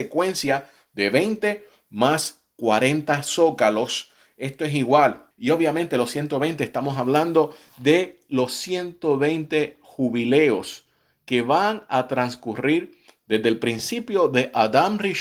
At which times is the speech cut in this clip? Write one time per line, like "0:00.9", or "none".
0:05.3